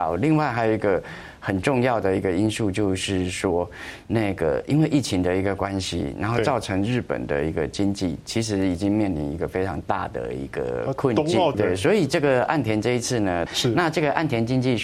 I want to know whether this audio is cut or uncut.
cut